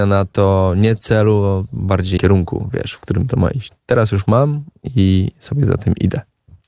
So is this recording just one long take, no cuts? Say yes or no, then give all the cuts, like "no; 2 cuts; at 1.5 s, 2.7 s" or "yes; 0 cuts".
no; 1 cut; at 2.2 s